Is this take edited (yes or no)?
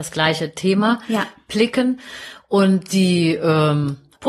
no